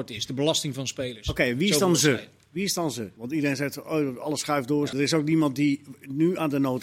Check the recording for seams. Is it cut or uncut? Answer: cut